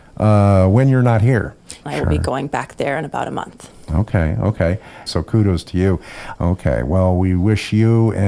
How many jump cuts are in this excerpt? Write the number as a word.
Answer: three